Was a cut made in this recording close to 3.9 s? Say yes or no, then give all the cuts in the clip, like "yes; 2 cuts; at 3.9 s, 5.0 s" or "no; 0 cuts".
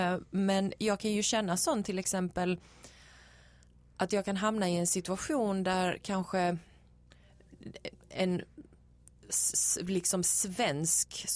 no; 0 cuts